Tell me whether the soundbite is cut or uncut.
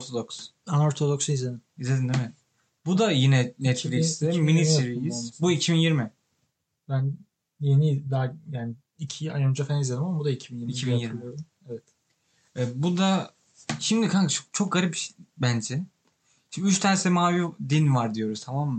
uncut